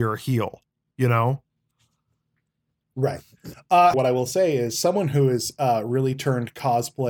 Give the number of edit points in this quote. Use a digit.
1